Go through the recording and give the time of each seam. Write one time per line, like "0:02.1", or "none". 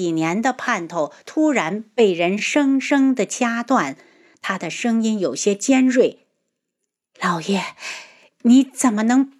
none